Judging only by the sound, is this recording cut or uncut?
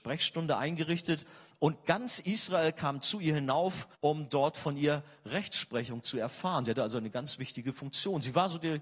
cut